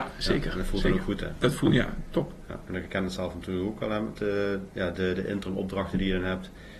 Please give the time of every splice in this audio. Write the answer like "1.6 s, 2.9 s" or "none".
2.7 s